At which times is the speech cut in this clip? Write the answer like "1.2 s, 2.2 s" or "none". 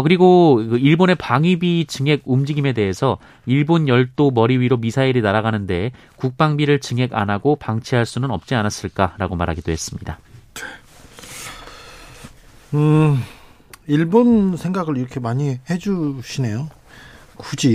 none